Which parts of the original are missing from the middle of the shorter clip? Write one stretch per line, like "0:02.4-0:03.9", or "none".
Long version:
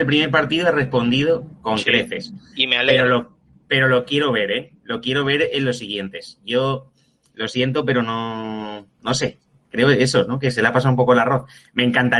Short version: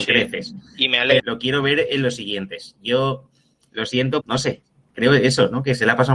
0:03.0-0:04.8
0:07.8-0:09.0